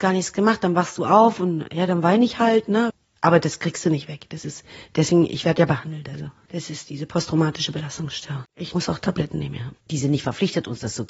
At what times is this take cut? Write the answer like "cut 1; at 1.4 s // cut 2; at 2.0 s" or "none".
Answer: cut 1; at 8.4 s // cut 2; at 9.8 s